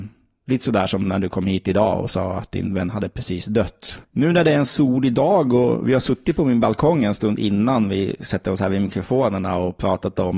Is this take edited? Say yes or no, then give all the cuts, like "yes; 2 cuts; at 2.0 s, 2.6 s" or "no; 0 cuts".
yes; 1 cut; at 4.0 s